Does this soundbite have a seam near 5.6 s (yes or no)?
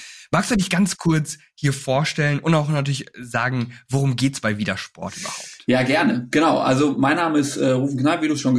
no